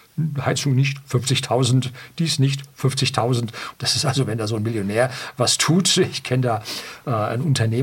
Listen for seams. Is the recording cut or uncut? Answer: cut